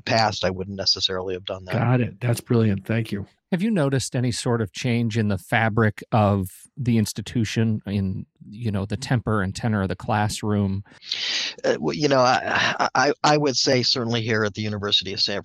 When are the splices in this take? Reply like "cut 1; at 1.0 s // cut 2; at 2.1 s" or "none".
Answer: none